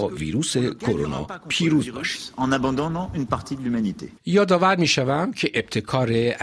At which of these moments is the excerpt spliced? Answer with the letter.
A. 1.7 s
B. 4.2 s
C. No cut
B